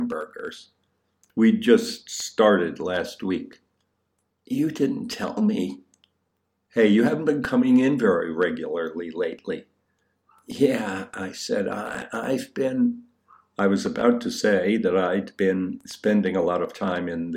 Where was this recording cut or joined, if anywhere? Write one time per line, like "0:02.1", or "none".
none